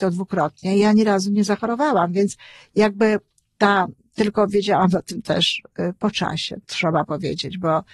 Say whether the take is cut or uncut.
cut